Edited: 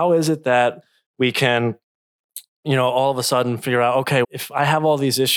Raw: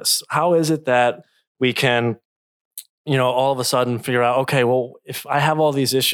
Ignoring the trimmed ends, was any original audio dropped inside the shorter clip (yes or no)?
yes